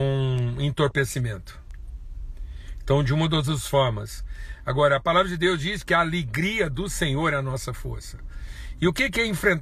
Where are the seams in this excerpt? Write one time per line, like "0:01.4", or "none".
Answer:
none